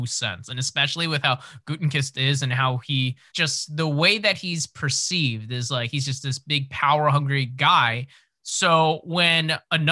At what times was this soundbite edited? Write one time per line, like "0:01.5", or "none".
0:03.3